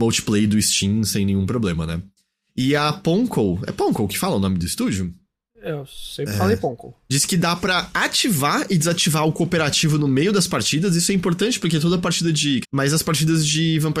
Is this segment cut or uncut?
cut